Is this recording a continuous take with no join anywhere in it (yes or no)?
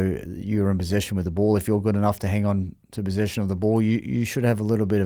yes